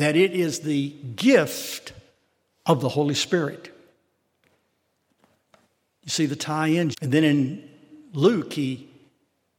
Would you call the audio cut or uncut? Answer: cut